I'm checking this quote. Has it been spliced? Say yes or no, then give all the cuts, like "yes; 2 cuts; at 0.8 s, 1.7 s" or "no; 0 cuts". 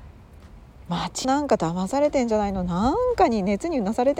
yes; 1 cut; at 1.2 s